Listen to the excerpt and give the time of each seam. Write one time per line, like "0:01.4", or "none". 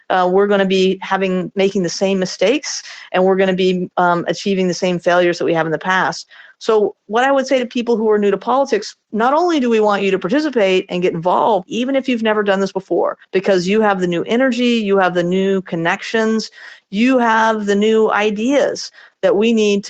0:09.0
0:11.7
0:13.2